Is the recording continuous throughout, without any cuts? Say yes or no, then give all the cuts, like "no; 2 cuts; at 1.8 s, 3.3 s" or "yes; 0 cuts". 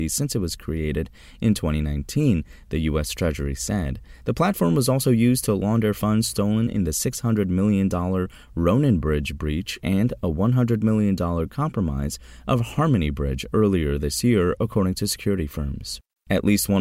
yes; 0 cuts